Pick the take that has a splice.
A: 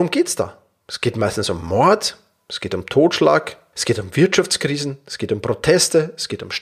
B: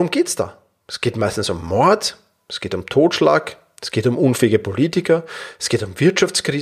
A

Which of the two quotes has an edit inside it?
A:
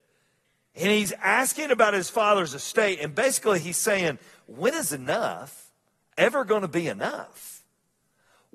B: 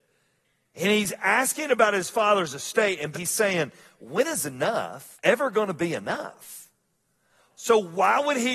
B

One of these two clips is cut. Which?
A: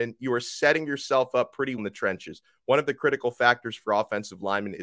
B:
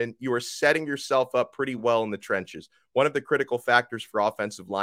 A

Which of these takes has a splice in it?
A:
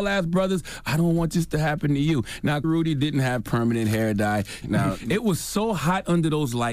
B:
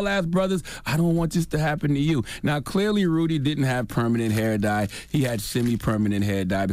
A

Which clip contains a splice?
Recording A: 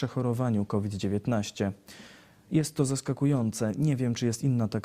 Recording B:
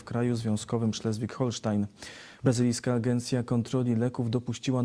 B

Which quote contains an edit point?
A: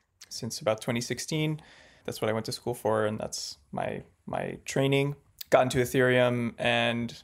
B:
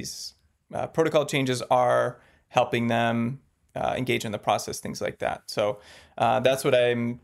A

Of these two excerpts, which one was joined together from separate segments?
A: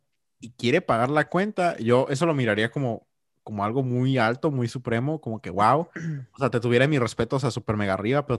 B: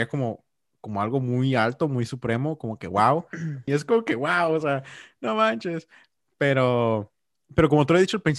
B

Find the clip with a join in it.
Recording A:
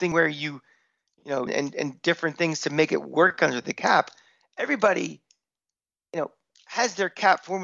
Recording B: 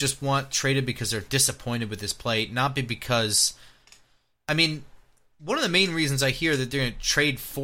A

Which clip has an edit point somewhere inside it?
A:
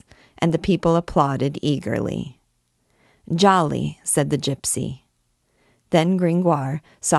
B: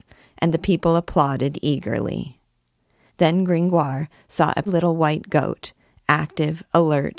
B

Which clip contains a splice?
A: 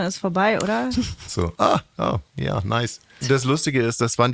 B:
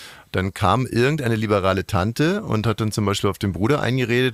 A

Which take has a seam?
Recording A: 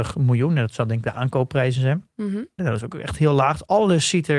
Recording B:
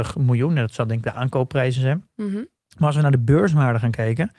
A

